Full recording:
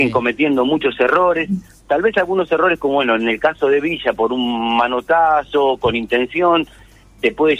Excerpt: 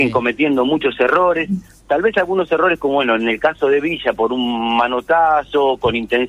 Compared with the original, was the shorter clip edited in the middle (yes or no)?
no